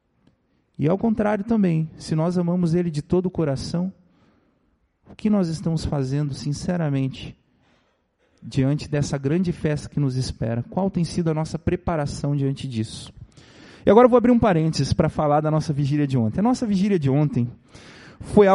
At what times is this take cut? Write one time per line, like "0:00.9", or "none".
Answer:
none

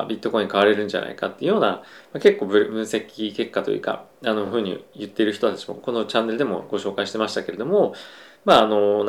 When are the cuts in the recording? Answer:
none

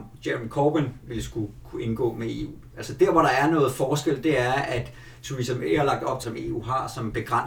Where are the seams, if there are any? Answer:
0:06.2

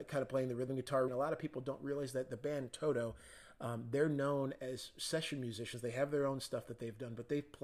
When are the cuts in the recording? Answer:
0:01.1

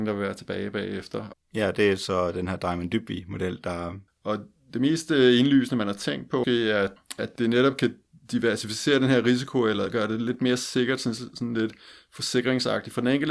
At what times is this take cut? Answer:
0:01.3
0:04.1
0:06.4

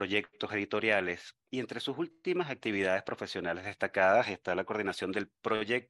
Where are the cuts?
none

